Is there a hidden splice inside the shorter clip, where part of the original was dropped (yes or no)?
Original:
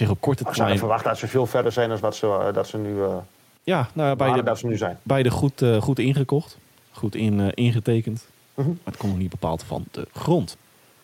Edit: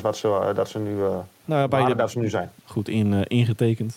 yes